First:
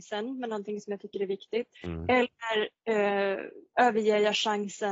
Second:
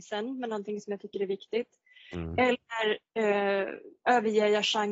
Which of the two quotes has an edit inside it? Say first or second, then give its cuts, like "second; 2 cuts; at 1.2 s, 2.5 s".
first; 1 cut; at 1.7 s